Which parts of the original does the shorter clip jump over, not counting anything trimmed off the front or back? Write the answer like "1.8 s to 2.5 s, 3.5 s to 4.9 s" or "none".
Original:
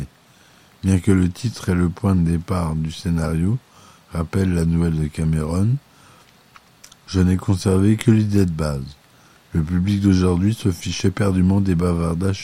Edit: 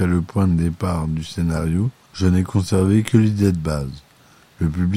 3.7 s to 7.0 s